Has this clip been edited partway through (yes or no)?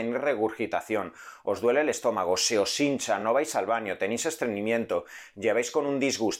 no